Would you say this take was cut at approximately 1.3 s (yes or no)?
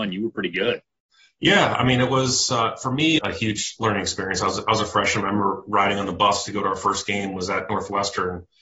no